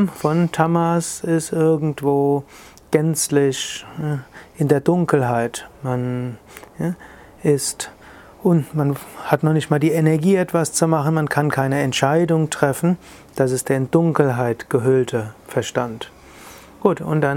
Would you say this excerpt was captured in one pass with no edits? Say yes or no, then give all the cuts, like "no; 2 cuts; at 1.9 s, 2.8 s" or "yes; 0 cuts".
no; 1 cut; at 5.7 s